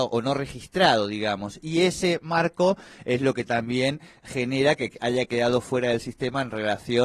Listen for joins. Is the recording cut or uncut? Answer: uncut